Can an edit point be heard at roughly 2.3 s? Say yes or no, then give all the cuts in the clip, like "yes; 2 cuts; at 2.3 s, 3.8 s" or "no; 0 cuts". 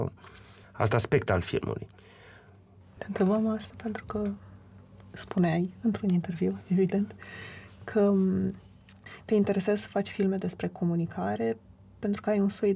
no; 0 cuts